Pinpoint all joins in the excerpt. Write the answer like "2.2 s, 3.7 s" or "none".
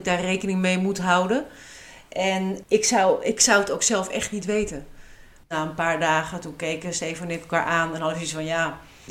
5.4 s